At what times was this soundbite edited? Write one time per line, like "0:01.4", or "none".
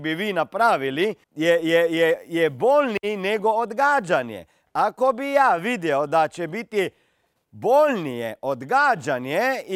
0:01.2